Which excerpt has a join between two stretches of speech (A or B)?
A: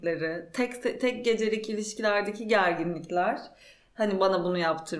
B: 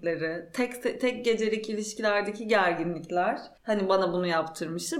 B